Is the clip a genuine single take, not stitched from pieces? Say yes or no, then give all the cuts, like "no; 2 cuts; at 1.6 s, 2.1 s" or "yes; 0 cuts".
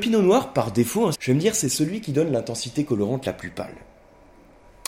no; 1 cut; at 1.1 s